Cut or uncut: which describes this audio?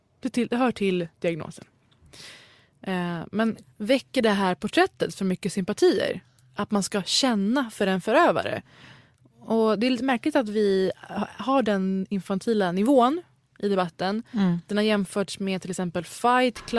uncut